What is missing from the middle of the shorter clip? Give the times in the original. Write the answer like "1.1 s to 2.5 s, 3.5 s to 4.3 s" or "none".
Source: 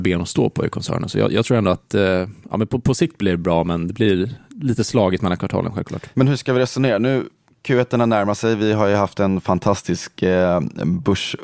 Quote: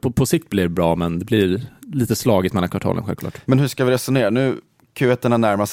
none